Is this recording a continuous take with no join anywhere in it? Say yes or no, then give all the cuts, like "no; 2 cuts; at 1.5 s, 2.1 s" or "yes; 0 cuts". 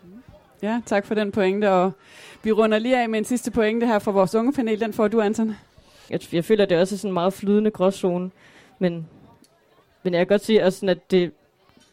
no; 1 cut; at 6.1 s